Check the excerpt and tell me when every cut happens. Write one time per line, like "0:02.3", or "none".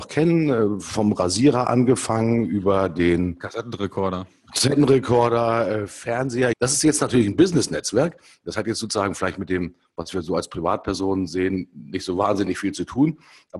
0:06.5